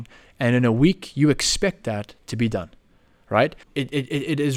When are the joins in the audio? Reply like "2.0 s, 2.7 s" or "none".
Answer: 3.6 s